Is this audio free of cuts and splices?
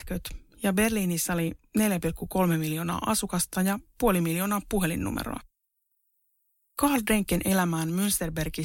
yes; 0 cuts

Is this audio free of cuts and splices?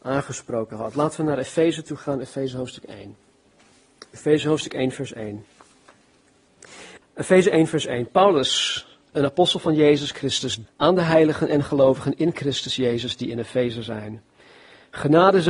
no; 2 cuts; at 7.0 s, 10.7 s

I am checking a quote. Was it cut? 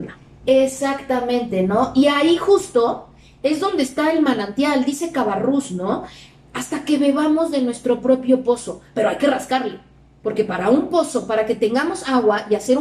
no; 0 cuts

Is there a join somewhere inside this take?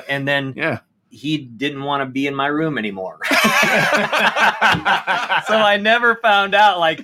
no; 0 cuts

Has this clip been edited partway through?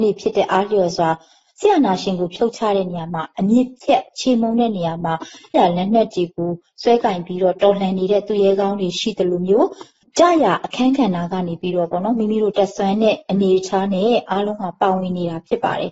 yes; 1 cut; at 5.5 s

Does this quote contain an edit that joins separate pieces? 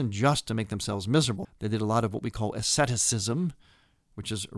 yes; 1 cut; at 1.4 s

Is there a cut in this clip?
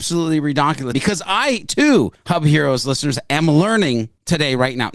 yes; 1 cut; at 0.9 s

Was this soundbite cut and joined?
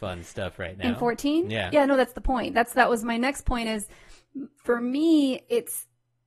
no; 0 cuts

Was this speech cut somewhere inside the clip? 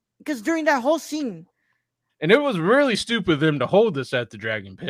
yes; 1 cut; at 2.1 s

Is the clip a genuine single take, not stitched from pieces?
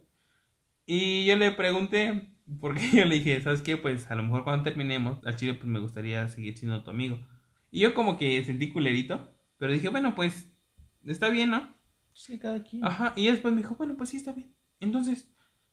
no; 2 cuts; at 5.2 s, 7.6 s

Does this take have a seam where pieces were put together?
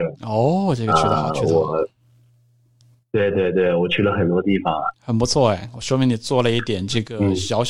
no; 0 cuts

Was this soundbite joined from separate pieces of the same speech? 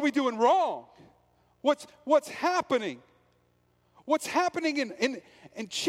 no; 0 cuts

